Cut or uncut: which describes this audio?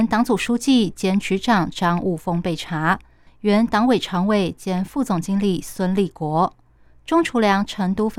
cut